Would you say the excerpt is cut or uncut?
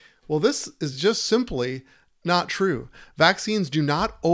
uncut